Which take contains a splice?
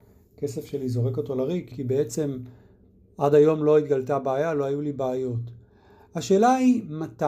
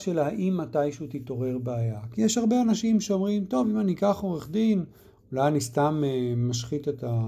first; 1 cut; at 1.7 s

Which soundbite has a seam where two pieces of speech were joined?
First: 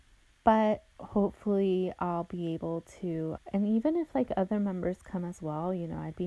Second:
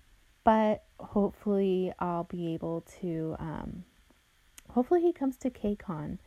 first; 1 cut; at 3.4 s

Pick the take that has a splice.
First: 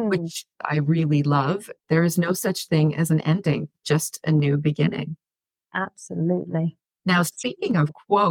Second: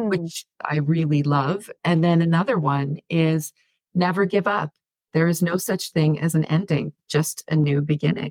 first; 1 cut; at 1.8 s

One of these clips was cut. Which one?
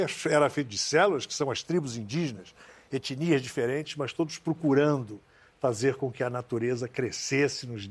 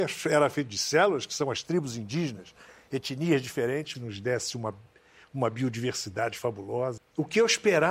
second; 2 cuts; at 3.9 s, 7.0 s

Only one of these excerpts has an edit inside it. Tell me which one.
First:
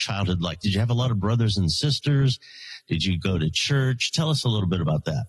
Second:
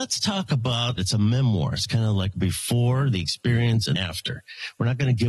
second; 2 cuts; at 1.0 s, 3.9 s

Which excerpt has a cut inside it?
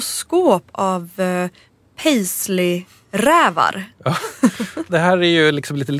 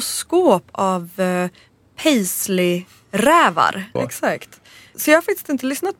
second; 1 cut; at 4.0 s

